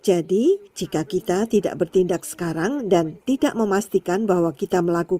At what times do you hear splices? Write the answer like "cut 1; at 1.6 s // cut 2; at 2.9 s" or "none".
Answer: none